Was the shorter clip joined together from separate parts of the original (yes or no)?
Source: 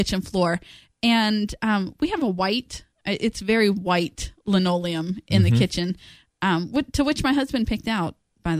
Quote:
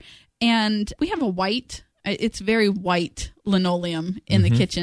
yes